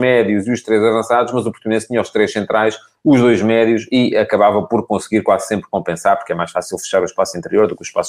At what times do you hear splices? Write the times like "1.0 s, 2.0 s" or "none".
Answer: none